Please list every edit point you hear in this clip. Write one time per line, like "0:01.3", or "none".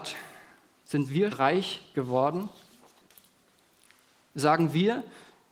0:01.3